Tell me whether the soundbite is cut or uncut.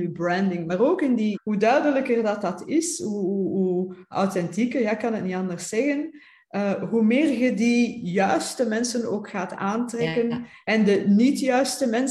cut